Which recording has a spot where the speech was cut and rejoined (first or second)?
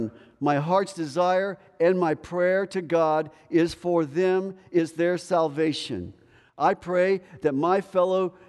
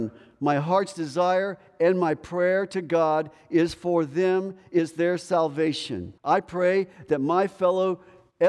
second